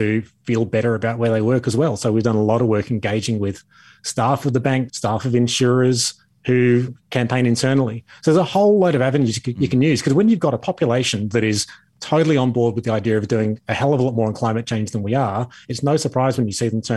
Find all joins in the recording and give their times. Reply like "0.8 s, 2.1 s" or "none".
4.9 s